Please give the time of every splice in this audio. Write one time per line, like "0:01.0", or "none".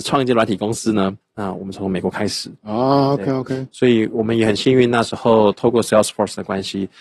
0:01.2